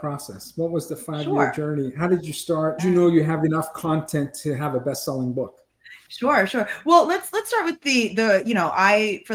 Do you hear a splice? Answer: yes; 1 cut; at 2.8 s

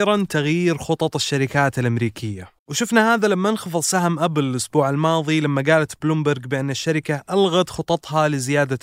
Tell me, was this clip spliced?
yes; 1 cut; at 2.6 s

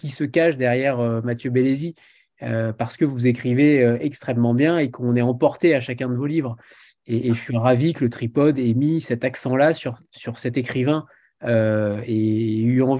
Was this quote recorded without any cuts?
yes; 0 cuts

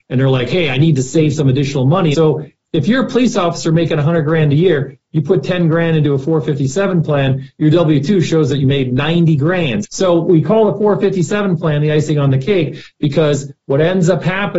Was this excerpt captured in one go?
no; 2 cuts; at 2.1 s, 9.8 s

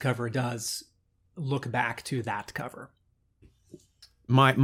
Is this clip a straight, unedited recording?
no; 1 cut; at 3.4 s

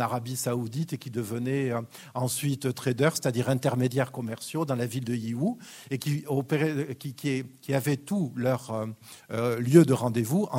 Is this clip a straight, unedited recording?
yes; 0 cuts

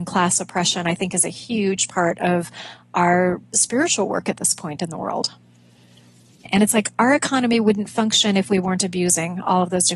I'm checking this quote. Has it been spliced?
yes; 1 cut; at 6.5 s

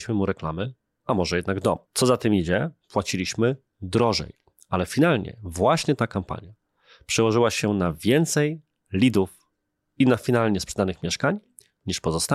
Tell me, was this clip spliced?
yes; 1 cut; at 1.8 s

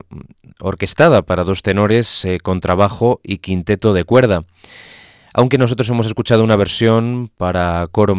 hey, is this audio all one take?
yes; 0 cuts

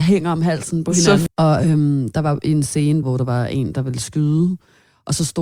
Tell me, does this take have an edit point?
yes; 2 cuts; at 1.3 s, 3.0 s

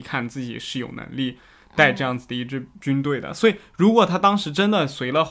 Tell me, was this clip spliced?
no; 0 cuts

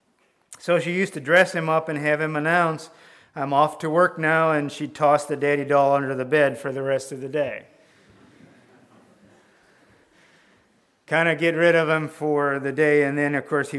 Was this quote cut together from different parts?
no; 0 cuts

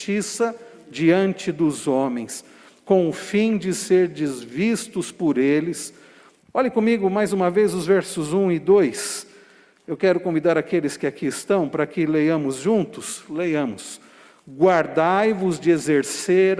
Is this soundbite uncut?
no; 1 cut; at 6.4 s

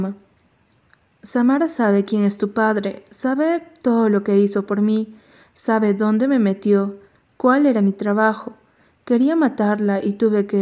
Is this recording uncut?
yes; 0 cuts

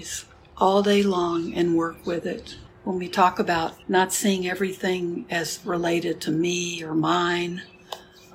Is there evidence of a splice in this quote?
yes; 2 cuts; at 2.7 s, 3.8 s

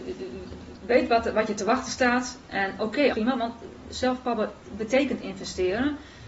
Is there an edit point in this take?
yes; 1 cut; at 3.1 s

